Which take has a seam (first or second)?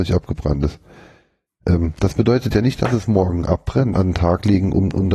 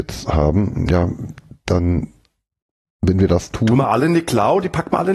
first